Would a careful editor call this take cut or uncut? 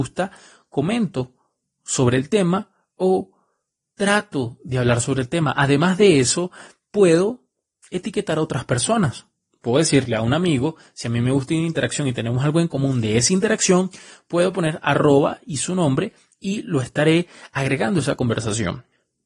uncut